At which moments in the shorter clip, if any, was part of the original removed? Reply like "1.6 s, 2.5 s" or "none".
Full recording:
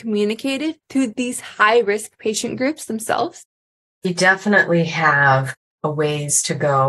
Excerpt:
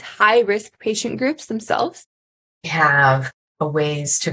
2.6 s